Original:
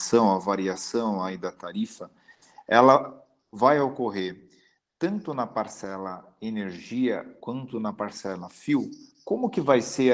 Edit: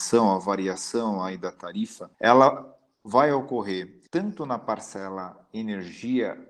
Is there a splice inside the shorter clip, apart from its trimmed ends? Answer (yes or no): yes